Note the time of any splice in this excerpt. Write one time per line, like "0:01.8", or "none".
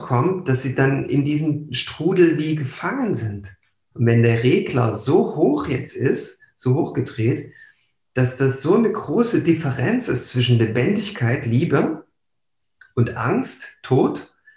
0:03.9